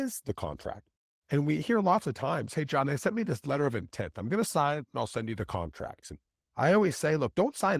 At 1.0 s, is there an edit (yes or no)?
no